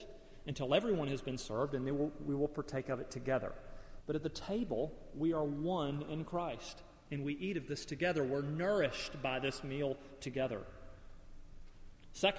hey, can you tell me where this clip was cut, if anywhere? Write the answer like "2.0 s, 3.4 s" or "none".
4.0 s